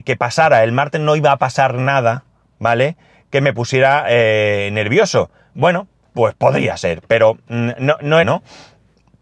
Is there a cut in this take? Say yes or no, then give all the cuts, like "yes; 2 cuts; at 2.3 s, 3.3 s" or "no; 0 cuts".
yes; 2 cuts; at 6.0 s, 8.2 s